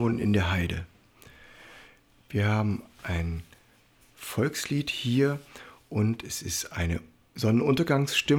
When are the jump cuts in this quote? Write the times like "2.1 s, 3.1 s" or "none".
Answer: none